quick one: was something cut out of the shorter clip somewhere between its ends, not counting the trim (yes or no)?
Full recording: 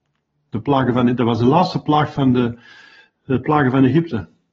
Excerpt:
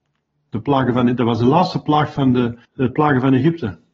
yes